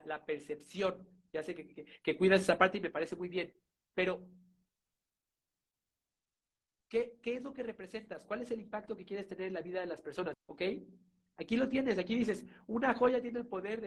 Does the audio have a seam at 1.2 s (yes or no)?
no